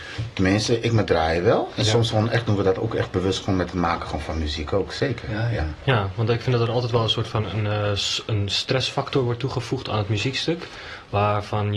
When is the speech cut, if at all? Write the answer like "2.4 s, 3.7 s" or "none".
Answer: none